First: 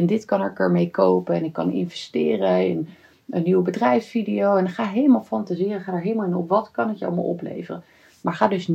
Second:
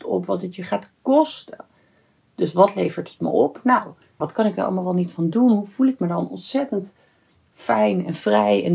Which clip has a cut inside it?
second; 1 cut; at 4.2 s

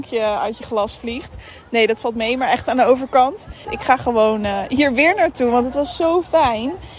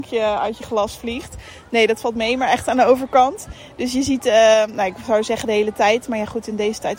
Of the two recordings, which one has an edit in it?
first; 1 cut; at 3.6 s

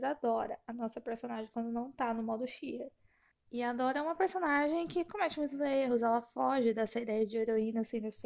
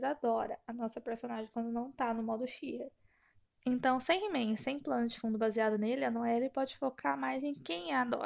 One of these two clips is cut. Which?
first; 1 cut; at 3.3 s

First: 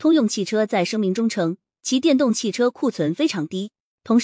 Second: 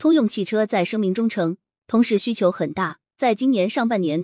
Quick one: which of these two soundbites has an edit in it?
second; 2 cuts; at 1.8 s, 3.1 s

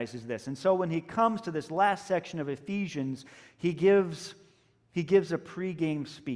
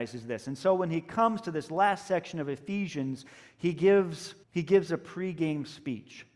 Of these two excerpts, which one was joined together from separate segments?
second; 1 cut; at 4.4 s

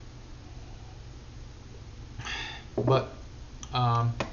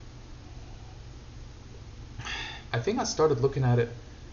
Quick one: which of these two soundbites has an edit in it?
second; 1 cut; at 2.7 s

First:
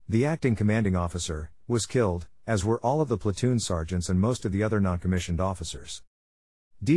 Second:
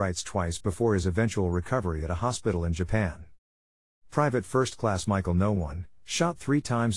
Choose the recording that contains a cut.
first; 1 cut; at 1.6 s

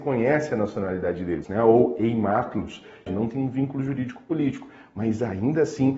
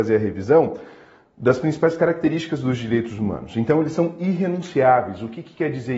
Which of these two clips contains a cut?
first; 2 cuts; at 1.4 s, 3.1 s

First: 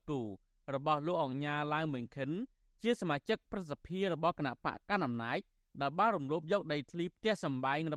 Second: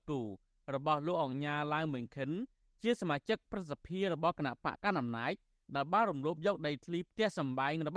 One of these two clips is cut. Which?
second; 1 cut; at 4.8 s

